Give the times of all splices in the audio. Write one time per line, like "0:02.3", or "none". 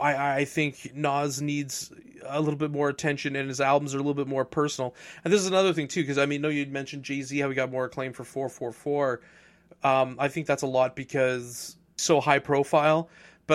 none